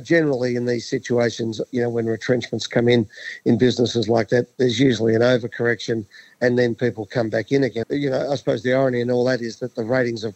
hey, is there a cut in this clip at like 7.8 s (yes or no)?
yes